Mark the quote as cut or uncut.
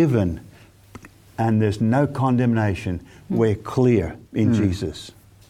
cut